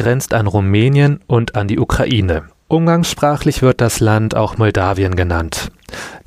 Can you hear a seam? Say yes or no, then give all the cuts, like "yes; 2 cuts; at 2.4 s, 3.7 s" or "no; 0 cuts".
no; 0 cuts